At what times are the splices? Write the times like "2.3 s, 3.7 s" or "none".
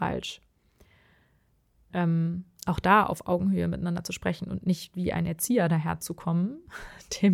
1.9 s